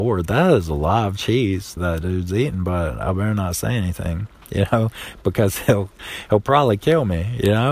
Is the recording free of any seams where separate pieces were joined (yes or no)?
no